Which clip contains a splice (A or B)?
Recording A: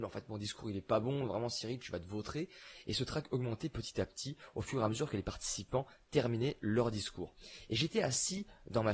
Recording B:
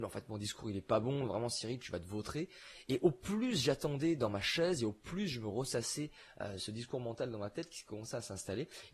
A